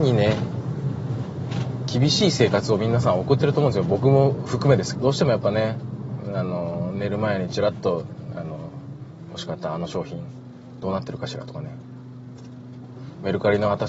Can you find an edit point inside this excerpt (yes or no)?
yes